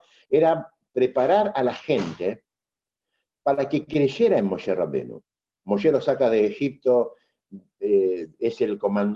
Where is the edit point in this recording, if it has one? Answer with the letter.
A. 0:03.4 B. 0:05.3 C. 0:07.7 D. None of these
D